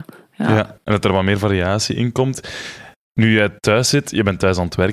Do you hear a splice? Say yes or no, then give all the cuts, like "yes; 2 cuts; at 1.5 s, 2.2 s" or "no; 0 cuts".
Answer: no; 0 cuts